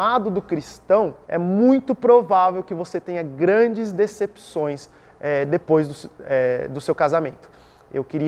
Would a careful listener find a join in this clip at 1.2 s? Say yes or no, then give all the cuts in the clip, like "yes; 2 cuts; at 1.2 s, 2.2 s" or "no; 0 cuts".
yes; 1 cut; at 1.2 s